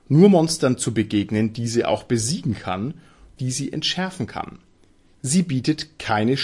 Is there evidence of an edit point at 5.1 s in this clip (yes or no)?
yes